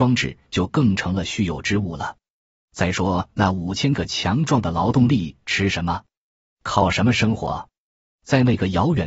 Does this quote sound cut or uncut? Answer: uncut